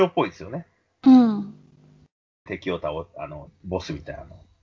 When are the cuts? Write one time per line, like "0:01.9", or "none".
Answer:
0:02.5
0:03.5

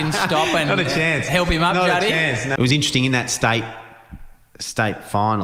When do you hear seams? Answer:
0:02.6

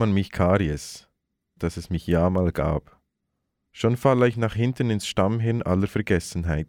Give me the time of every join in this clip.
0:01.6
0:03.7

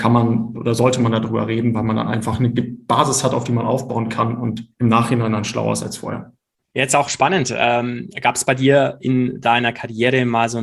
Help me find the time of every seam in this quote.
0:04.7
0:06.6

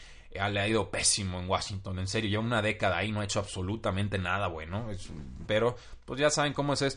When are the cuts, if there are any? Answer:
0:05.5

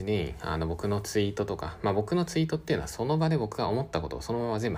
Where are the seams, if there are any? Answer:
none

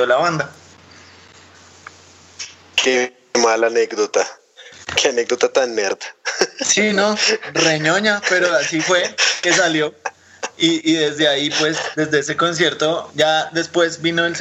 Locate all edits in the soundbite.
none

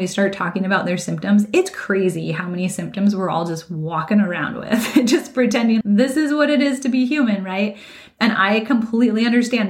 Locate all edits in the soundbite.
0:05.8

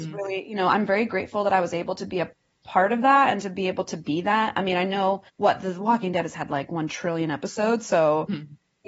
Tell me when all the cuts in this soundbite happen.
0:05.3

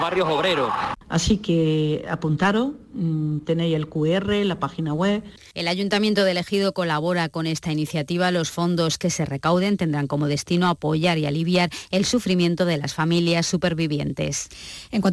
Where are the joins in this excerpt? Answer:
0:01.0

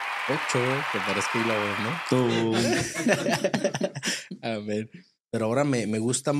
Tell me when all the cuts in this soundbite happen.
0:05.2

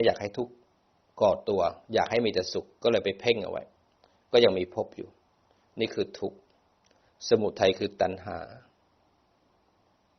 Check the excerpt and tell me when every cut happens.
none

